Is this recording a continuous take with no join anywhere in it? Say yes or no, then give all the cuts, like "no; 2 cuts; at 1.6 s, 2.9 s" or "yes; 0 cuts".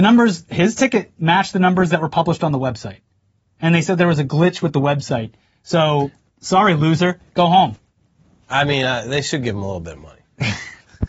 yes; 0 cuts